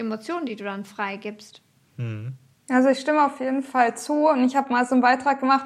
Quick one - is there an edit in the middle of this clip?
no; 0 cuts

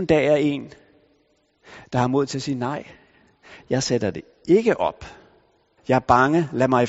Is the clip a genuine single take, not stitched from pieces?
no; 1 cut; at 5.8 s

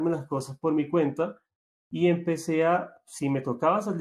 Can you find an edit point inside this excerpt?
no; 0 cuts

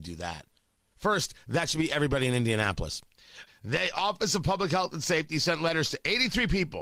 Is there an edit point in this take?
yes; 2 cuts; at 0.9 s, 3.5 s

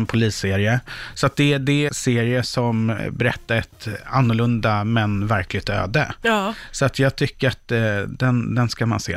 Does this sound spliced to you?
yes; 1 cut; at 1.9 s

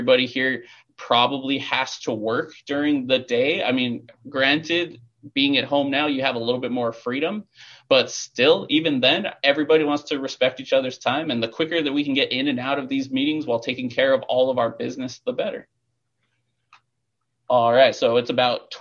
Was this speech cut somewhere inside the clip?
no; 0 cuts

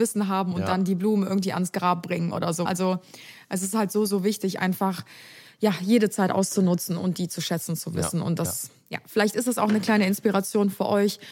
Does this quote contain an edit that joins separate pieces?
yes; 1 cut; at 2.7 s

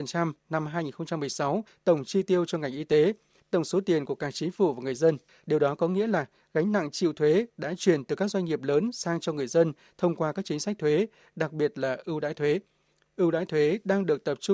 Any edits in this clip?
no; 0 cuts

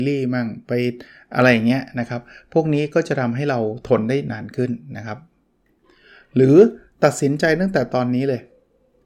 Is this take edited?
no; 0 cuts

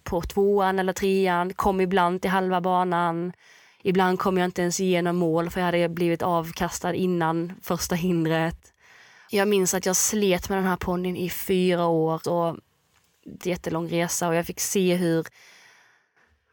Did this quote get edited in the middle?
yes; 2 cuts; at 12.2 s, 13.4 s

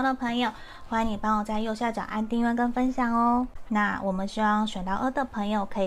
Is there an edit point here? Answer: yes; 1 cut; at 3.7 s

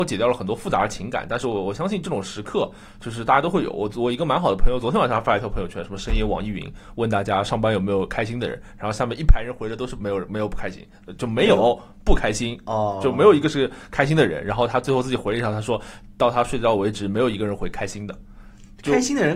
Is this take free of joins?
yes; 0 cuts

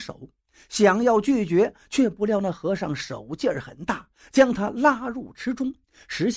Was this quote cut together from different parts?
no; 0 cuts

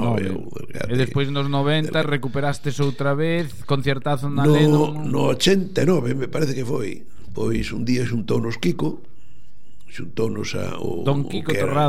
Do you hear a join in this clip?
no; 0 cuts

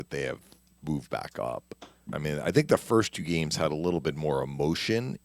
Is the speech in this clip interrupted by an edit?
yes; 1 cut; at 2.1 s

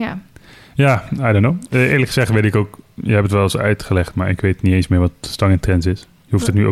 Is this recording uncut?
yes; 0 cuts

